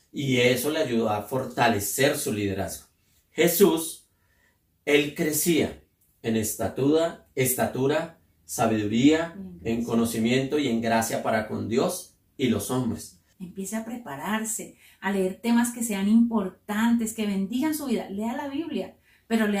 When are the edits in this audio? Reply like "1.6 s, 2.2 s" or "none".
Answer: 13.3 s